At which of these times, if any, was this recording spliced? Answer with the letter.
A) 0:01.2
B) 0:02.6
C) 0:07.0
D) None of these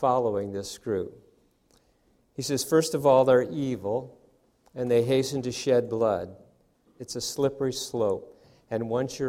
C